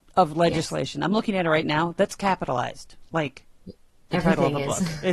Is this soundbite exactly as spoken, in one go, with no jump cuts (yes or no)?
yes